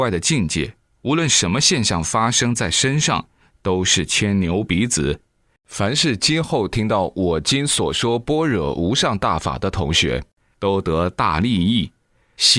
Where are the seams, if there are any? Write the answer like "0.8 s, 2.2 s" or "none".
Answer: 5.6 s